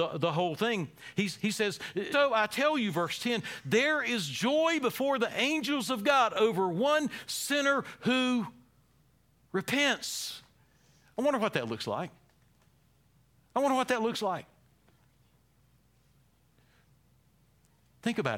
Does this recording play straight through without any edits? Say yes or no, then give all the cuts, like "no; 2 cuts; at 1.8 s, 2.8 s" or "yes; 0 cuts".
no; 1 cut; at 2.1 s